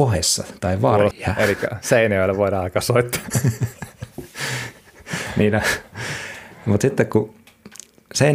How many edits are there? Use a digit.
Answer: 1